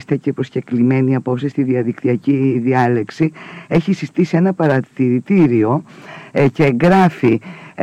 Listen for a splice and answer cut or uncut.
uncut